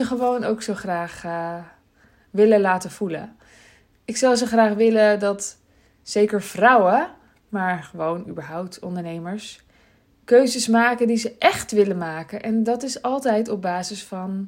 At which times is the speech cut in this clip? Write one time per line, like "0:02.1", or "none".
none